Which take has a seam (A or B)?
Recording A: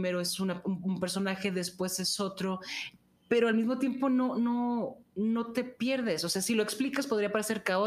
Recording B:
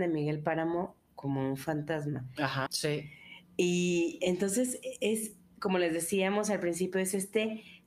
B